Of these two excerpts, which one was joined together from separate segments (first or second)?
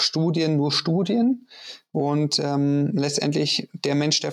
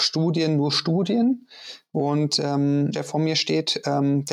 second